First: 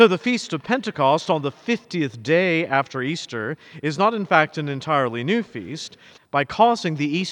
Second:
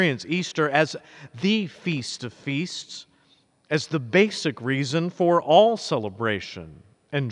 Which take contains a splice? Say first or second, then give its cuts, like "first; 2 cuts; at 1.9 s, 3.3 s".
first; 1 cut; at 6.2 s